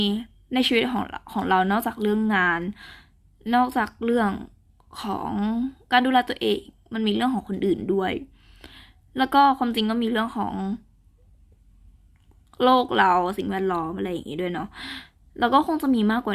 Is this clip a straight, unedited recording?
yes; 0 cuts

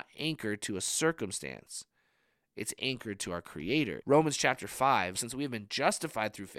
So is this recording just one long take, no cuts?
no; 2 cuts; at 4.0 s, 5.1 s

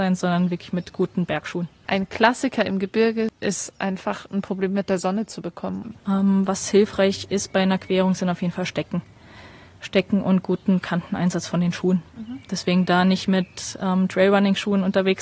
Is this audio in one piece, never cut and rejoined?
no; 1 cut; at 5.9 s

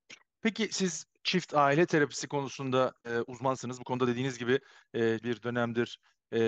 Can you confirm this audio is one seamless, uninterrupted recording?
no; 2 cuts; at 3.0 s, 5.2 s

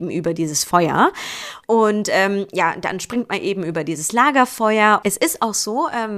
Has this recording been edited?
yes; 2 cuts; at 1.6 s, 5.0 s

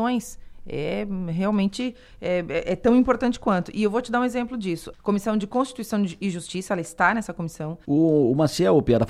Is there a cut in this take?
yes; 2 cuts; at 4.9 s, 7.8 s

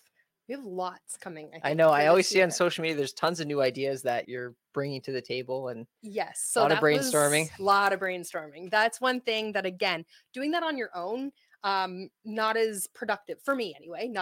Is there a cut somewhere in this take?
yes; 1 cut; at 4.2 s

